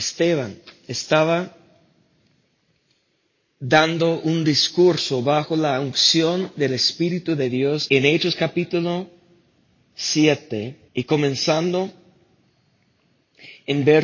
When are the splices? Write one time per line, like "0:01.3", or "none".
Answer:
0:07.9
0:10.9